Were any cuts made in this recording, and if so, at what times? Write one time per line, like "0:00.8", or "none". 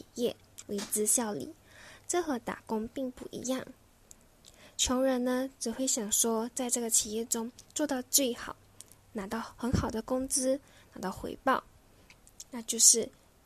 none